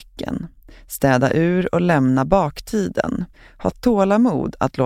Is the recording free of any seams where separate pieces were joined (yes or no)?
yes